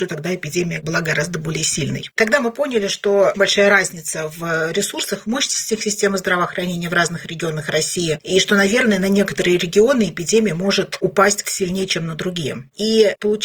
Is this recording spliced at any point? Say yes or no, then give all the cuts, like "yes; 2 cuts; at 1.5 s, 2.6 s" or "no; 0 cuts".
yes; 2 cuts; at 3.3 s, 11.4 s